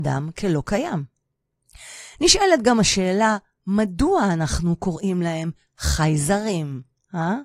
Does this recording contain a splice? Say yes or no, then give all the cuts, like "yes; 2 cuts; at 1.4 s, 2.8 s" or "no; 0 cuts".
no; 0 cuts